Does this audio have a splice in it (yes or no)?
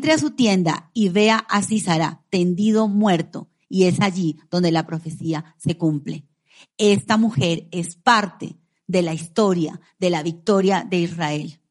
no